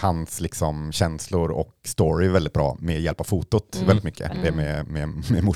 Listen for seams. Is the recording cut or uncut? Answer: cut